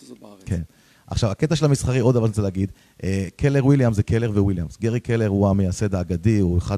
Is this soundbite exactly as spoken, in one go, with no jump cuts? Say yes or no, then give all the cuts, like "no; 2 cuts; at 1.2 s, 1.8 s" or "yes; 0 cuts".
yes; 0 cuts